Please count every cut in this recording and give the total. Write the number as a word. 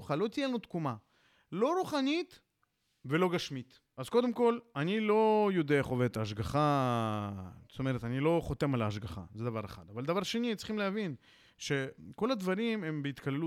zero